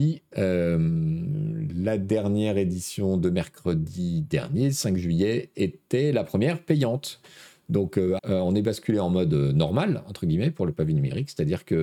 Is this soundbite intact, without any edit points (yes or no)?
no